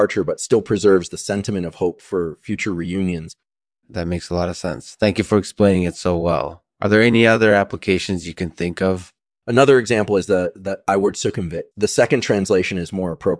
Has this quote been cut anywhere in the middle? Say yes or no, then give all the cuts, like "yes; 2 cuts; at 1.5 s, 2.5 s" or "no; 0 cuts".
yes; 2 cuts; at 9.4 s, 11.7 s